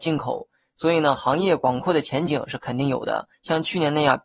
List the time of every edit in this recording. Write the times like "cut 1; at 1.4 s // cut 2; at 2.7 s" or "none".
cut 1; at 3.3 s

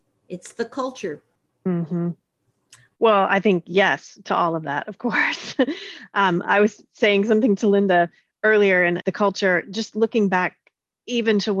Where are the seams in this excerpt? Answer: cut 1; at 2.9 s // cut 2; at 9.0 s

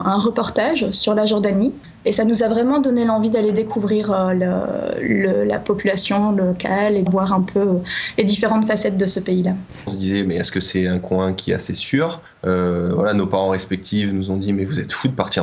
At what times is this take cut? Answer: cut 1; at 7.1 s // cut 2; at 9.9 s

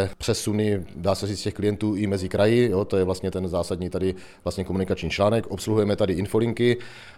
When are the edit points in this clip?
none

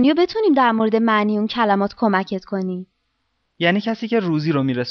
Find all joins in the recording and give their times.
cut 1; at 3.4 s

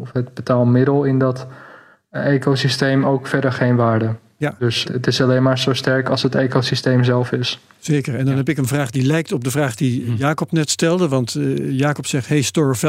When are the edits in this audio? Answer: cut 1; at 4.8 s

